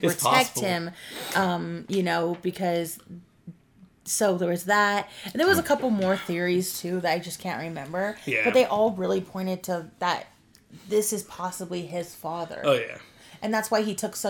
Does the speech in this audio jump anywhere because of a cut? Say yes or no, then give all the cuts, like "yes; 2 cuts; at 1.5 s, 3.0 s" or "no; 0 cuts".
no; 0 cuts